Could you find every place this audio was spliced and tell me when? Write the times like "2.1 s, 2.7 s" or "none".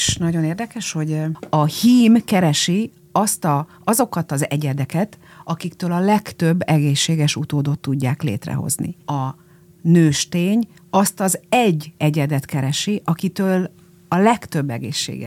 9.0 s